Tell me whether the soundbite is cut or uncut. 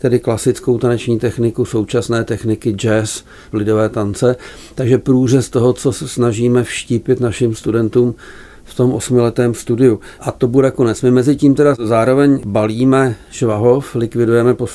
cut